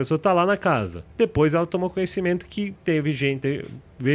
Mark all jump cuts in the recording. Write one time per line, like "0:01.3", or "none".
0:01.1